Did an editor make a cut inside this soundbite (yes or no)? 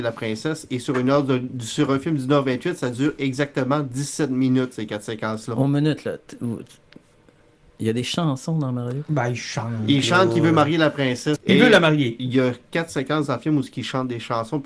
yes